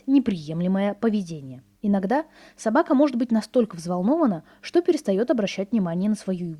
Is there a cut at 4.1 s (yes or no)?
no